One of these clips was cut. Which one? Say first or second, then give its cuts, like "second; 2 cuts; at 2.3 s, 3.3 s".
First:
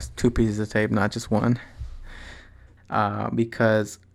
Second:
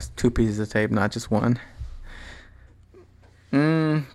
first; 1 cut; at 2.8 s